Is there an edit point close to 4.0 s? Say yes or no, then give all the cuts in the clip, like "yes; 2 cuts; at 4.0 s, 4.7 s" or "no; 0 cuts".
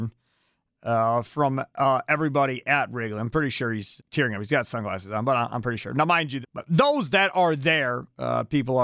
yes; 2 cuts; at 4.0 s, 6.4 s